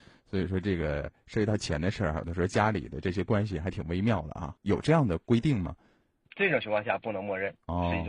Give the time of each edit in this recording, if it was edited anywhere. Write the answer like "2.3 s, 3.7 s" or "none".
4.6 s

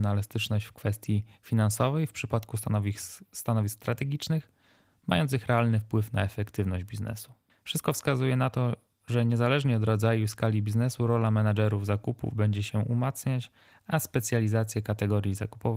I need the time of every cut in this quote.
none

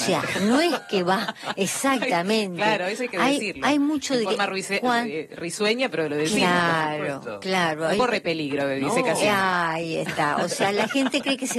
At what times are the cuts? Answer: none

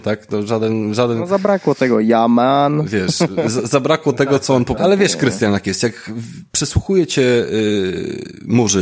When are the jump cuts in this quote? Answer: 4.8 s

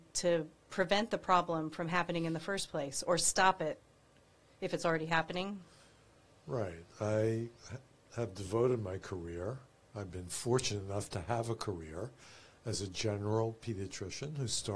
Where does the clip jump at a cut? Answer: none

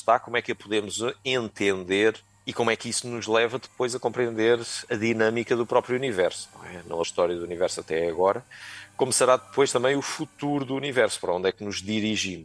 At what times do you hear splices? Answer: 7.0 s

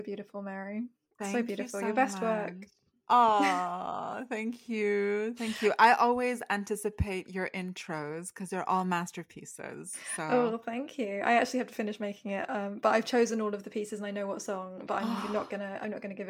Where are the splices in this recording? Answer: none

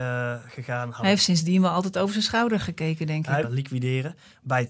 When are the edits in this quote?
3.4 s

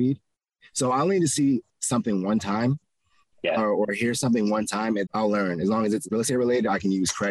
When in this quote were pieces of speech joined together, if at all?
5.1 s

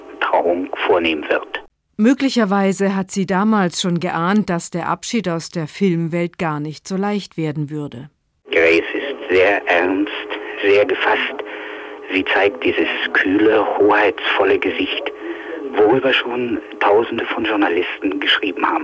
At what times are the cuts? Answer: none

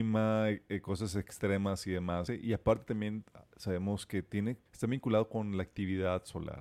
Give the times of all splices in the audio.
2.3 s, 4.7 s

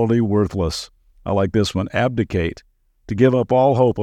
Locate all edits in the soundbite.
none

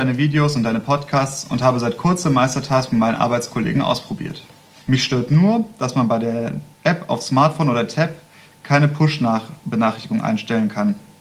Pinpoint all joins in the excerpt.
4.8 s

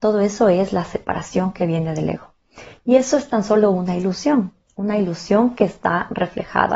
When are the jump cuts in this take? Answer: none

